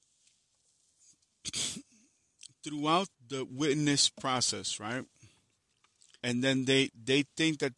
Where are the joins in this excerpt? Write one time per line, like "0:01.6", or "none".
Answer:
0:03.1
0:06.2